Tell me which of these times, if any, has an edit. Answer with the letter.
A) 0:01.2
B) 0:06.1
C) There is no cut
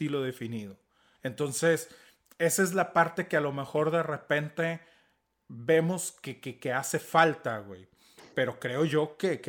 A